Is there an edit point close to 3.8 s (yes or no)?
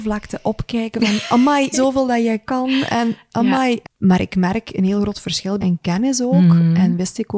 yes